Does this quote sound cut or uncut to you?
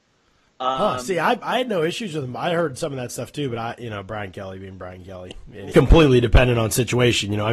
cut